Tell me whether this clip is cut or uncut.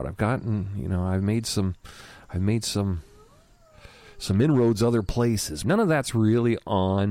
cut